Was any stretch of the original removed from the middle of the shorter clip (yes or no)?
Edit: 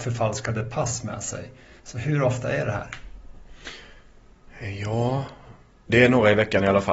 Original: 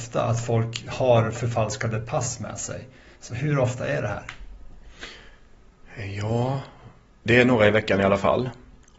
no